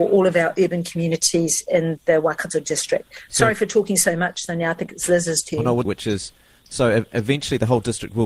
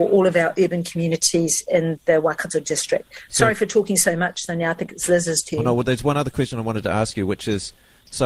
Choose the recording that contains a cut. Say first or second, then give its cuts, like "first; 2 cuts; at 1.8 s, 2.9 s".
first; 1 cut; at 5.9 s